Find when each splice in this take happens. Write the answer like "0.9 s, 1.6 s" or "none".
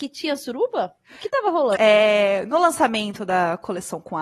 1.7 s